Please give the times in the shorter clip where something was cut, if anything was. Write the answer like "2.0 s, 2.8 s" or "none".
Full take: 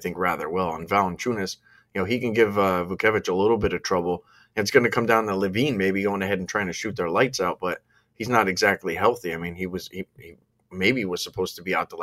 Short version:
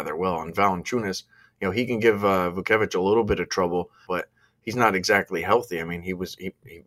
4.1 s